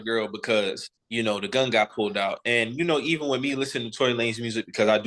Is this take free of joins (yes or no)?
no